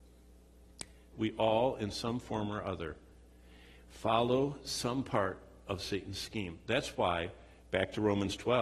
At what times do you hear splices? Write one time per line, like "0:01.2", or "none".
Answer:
0:01.1